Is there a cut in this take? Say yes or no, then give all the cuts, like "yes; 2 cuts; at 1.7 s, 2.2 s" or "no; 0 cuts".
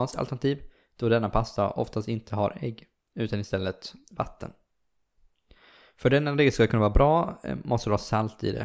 no; 0 cuts